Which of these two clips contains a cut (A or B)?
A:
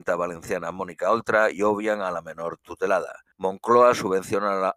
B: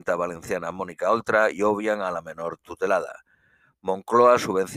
A